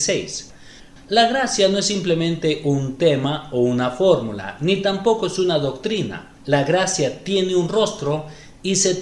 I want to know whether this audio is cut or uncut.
cut